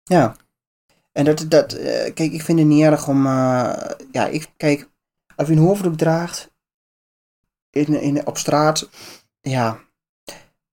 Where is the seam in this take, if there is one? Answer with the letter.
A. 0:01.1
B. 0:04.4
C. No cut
B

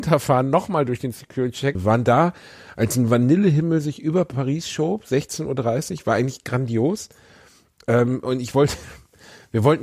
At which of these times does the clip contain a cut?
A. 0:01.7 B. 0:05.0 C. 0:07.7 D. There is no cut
A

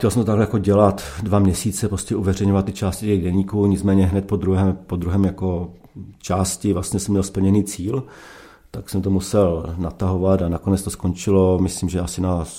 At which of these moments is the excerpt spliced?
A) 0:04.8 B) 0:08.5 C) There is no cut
C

